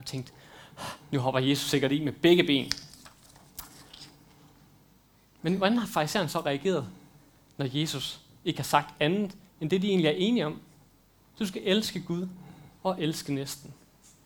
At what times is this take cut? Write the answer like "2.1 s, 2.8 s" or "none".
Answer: none